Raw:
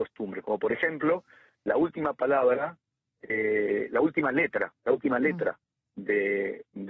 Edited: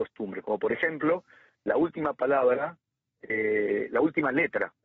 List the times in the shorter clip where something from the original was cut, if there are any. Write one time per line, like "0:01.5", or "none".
none